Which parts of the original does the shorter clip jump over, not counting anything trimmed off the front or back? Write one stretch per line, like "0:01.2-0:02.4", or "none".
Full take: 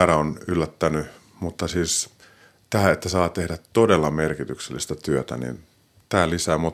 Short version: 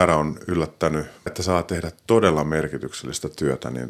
0:01.3-0:02.9